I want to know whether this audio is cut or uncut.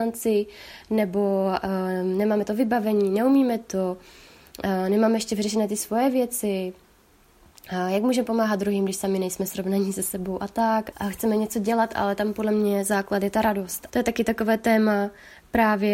cut